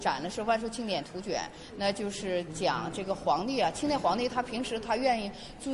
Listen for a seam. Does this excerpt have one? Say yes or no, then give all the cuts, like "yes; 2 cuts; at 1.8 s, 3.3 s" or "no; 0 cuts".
no; 0 cuts